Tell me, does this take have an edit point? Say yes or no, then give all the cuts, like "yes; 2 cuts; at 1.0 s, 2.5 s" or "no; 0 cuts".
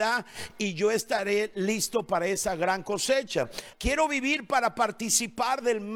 yes; 1 cut; at 3.7 s